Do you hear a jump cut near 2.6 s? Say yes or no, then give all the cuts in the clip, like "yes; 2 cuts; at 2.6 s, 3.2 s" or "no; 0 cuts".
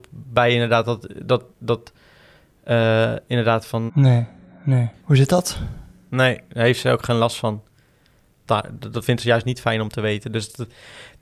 no; 3 cuts; at 3.9 s, 5.0 s, 8.5 s